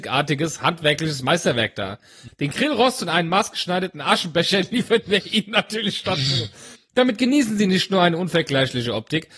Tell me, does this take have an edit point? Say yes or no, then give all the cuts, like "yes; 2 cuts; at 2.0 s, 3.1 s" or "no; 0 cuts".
yes; 2 cuts; at 2.3 s, 6.8 s